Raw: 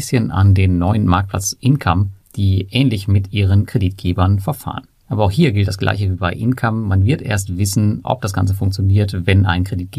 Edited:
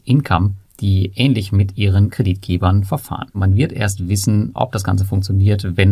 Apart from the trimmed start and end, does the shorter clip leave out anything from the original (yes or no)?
yes